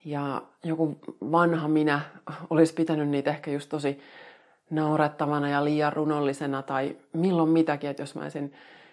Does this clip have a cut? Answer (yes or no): no